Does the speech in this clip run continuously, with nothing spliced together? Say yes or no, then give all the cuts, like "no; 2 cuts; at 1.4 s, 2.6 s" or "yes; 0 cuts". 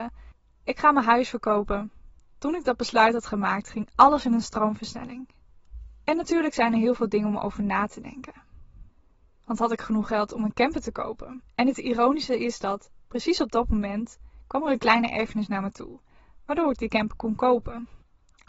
yes; 0 cuts